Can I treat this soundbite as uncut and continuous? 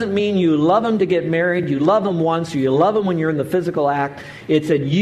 yes; 0 cuts

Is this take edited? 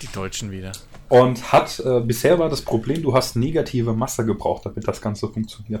no; 0 cuts

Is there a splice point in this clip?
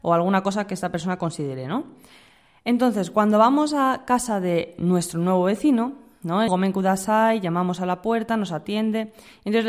yes; 1 cut; at 6.5 s

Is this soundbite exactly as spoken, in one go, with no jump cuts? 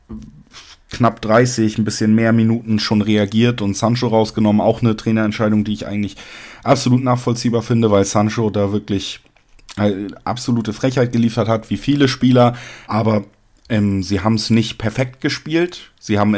no; 1 cut; at 12.9 s

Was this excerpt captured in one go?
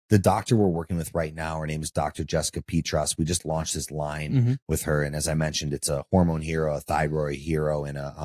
yes; 0 cuts

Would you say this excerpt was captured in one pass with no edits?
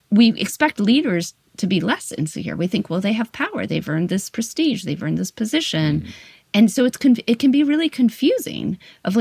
yes; 0 cuts

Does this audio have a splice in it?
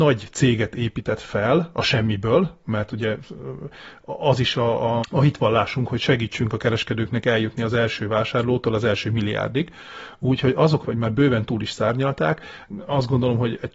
yes; 2 cuts; at 5.0 s, 10.8 s

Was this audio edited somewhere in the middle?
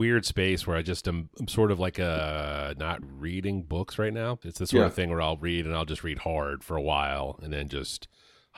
yes; 2 cuts; at 3.0 s, 4.4 s

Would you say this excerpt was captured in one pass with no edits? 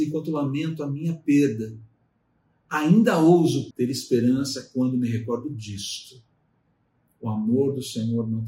no; 1 cut; at 3.7 s

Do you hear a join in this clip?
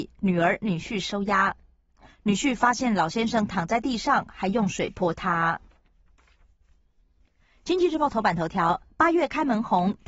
no; 0 cuts

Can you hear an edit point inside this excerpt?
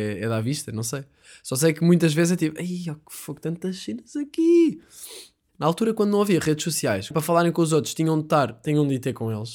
yes; 2 cuts; at 5.5 s, 7.1 s

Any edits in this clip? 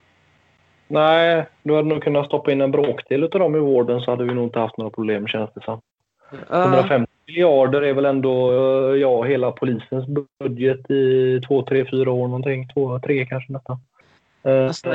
no; 0 cuts

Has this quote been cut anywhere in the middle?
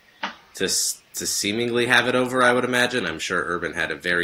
yes; 1 cut; at 3.0 s

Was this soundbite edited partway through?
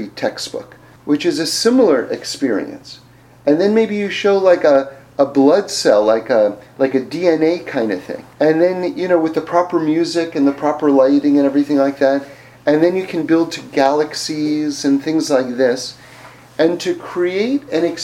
yes; 2 cuts; at 1.0 s, 8.3 s

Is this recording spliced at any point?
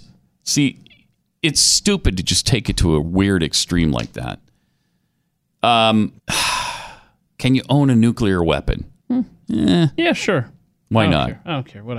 yes; 2 cuts; at 6.2 s, 9.0 s

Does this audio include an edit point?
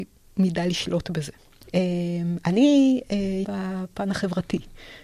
yes; 2 cuts; at 1.6 s, 3.4 s

